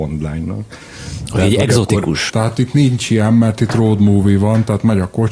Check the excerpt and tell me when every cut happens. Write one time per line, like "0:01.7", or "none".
0:02.3